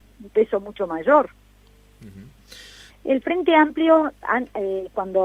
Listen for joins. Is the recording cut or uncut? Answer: cut